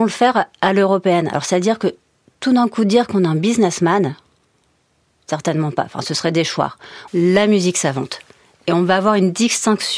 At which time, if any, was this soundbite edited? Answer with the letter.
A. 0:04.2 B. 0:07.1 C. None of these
B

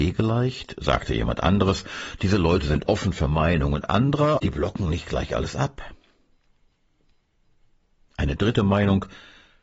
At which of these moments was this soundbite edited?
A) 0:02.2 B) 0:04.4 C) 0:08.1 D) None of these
B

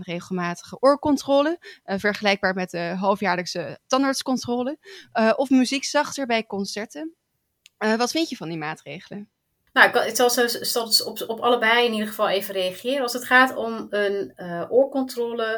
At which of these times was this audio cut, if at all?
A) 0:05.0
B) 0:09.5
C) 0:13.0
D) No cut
D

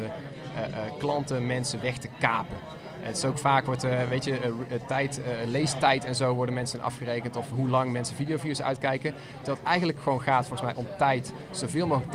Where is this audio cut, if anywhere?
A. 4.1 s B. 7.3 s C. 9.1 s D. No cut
D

